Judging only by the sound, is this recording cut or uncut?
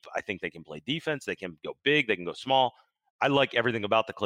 uncut